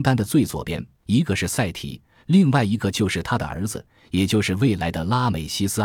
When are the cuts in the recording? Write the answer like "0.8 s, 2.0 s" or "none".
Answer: 1.0 s